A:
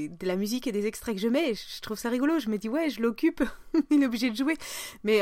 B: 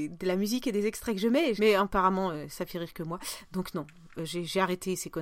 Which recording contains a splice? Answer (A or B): B